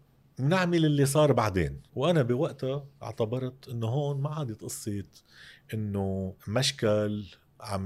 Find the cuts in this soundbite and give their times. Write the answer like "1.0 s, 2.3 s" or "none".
1.9 s, 6.4 s